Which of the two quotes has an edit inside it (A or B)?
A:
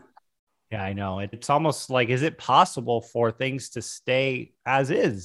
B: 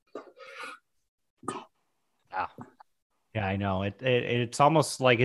A